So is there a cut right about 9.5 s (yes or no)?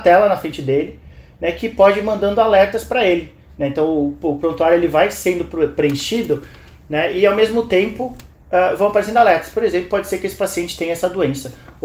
no